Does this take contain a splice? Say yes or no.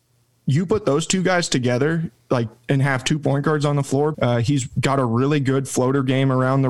yes